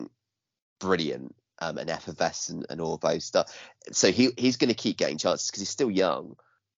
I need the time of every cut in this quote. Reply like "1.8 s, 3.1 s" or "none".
none